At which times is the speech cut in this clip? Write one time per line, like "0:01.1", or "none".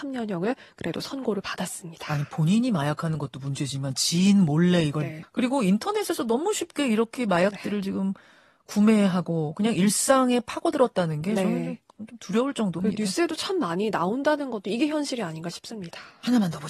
0:05.2